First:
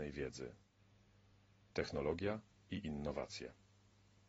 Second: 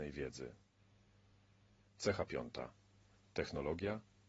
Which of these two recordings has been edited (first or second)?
first